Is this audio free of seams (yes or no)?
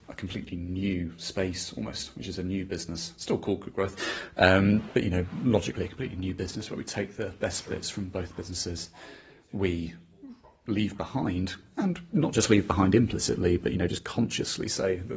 yes